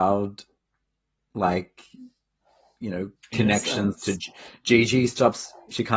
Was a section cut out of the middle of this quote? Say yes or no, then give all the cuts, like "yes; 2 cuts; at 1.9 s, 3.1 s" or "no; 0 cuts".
no; 0 cuts